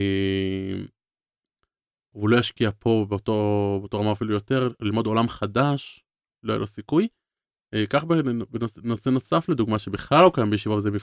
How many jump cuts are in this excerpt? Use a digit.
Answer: 1